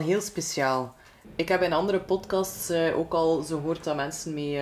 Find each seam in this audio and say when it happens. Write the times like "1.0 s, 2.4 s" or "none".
none